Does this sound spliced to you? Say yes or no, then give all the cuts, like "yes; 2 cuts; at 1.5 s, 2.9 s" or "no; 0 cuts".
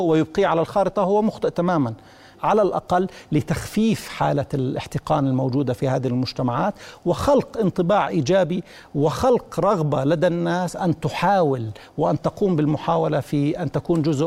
yes; 1 cut; at 2.4 s